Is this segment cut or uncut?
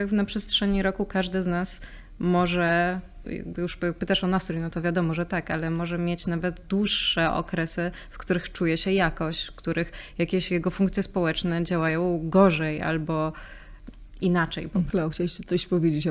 cut